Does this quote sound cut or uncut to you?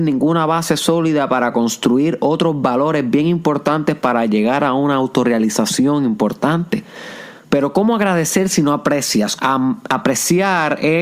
cut